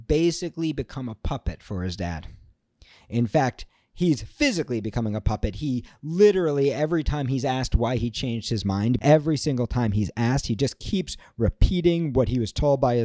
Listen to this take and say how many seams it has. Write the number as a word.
one